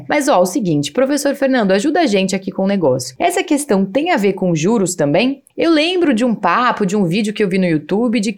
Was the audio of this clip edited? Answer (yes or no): yes